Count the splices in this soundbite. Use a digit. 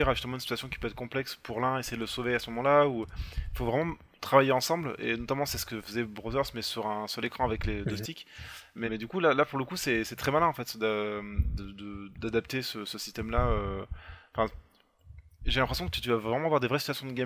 1